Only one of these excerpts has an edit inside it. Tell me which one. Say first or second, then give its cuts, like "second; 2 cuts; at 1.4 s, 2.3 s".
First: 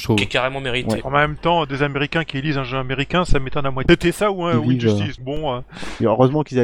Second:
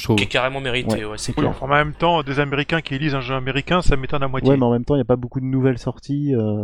first; 3 cuts; at 1.0 s, 3.9 s, 5.2 s